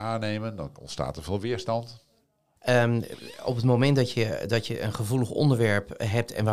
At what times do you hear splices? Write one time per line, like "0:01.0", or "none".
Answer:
0:02.6